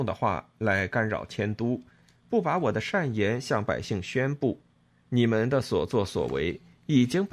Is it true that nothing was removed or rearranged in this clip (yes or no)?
no